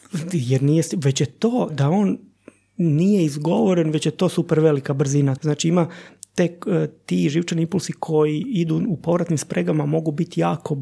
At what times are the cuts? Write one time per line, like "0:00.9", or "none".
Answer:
0:01.7
0:05.4